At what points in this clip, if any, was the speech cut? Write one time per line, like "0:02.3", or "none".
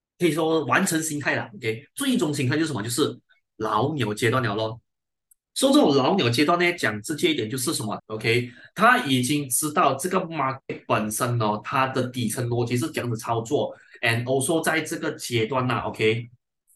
0:08.0